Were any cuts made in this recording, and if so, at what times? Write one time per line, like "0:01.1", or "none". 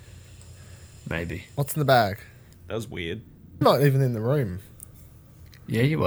0:02.5
0:03.6